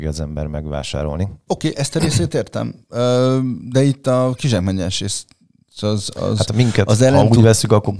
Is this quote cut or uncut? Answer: cut